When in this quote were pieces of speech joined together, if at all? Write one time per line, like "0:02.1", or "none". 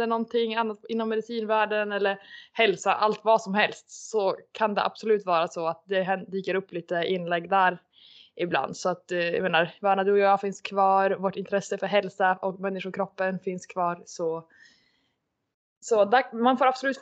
none